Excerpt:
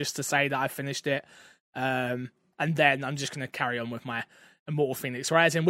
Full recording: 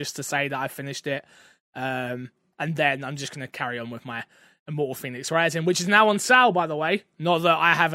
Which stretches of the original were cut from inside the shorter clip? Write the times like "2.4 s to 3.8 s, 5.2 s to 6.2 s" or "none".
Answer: none